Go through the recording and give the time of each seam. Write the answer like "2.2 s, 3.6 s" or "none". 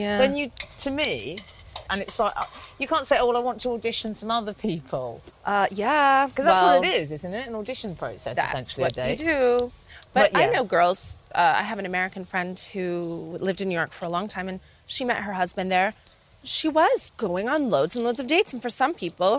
1.9 s, 17.1 s